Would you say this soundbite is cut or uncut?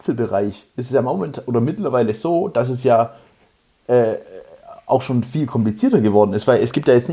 uncut